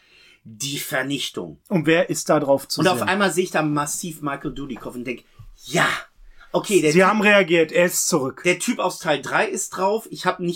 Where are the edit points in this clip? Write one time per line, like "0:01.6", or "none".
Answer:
none